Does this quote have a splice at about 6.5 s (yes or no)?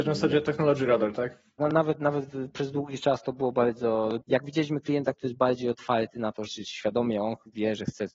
yes